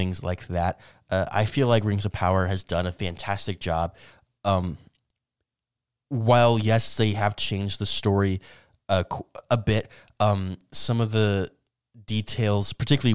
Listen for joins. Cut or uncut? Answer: uncut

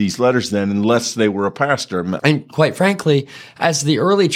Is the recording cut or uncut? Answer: cut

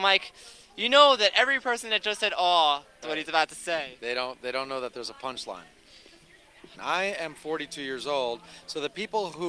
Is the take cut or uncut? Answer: cut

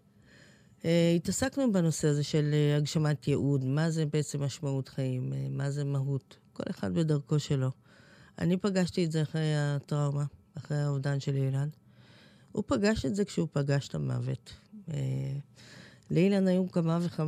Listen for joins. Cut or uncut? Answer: uncut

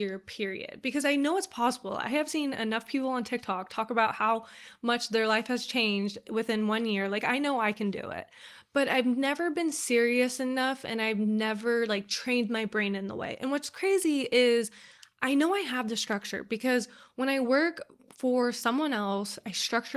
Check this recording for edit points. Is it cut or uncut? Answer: uncut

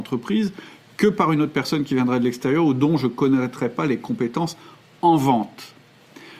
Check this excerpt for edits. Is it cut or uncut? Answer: uncut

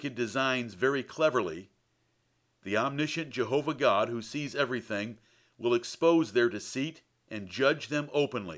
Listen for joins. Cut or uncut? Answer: uncut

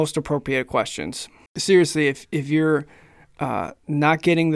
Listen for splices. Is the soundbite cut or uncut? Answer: cut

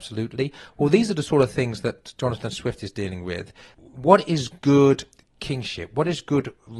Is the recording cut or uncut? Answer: cut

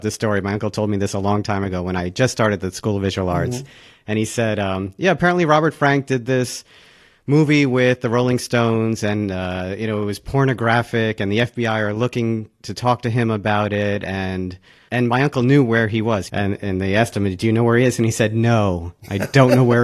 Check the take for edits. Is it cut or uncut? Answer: cut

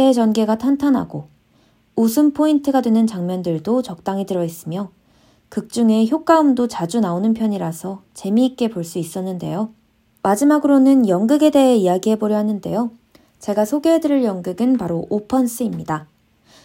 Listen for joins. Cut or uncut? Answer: cut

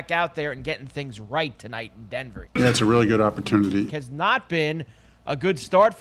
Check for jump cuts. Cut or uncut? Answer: cut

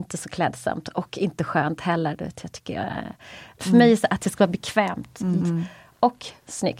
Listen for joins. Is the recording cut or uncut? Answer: cut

